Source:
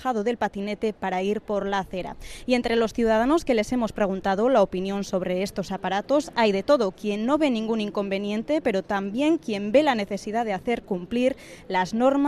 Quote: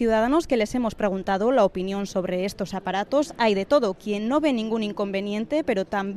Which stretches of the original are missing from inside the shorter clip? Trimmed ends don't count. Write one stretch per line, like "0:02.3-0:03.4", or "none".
none